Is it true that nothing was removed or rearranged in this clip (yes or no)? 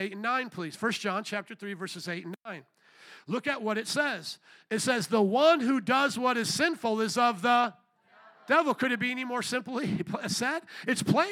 yes